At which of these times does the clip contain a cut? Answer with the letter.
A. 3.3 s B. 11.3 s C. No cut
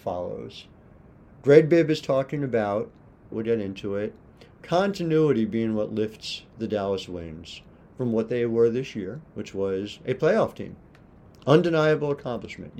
A